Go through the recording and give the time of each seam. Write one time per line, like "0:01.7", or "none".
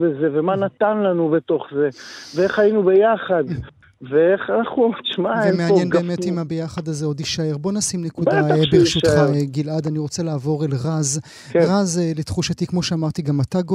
none